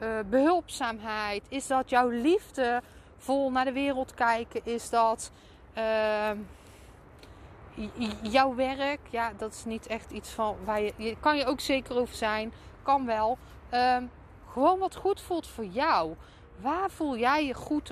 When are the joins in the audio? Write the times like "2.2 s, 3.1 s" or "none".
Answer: none